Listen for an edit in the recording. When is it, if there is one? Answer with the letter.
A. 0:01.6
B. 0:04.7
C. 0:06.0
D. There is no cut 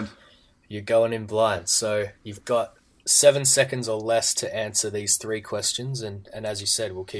D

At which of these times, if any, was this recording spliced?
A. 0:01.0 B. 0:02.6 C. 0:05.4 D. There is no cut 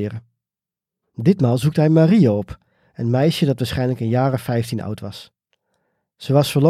A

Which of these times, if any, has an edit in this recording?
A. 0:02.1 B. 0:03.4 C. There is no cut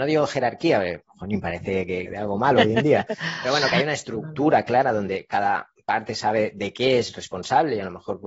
A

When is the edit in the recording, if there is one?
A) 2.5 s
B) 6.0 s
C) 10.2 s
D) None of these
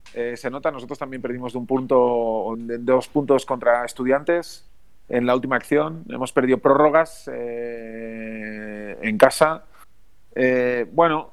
A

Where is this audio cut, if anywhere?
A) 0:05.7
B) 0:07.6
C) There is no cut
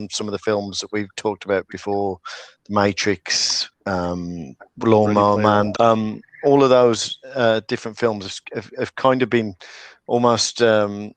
A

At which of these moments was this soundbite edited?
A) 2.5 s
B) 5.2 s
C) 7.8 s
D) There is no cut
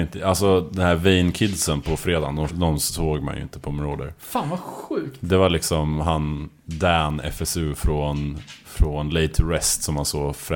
A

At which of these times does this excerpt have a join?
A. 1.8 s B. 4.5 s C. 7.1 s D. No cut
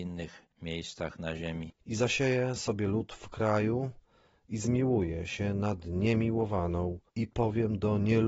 C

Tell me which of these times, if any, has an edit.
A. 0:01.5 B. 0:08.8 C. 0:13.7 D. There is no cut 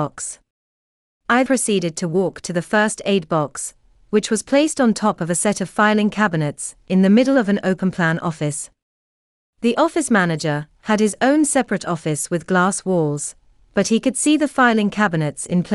A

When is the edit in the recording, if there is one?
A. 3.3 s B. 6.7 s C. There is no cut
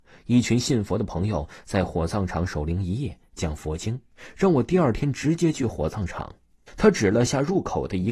B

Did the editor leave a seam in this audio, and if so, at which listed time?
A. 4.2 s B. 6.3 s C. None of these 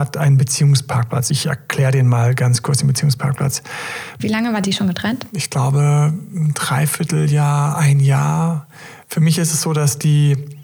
A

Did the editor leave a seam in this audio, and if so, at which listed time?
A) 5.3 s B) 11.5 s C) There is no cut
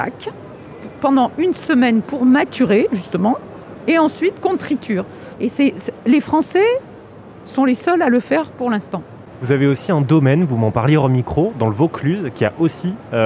A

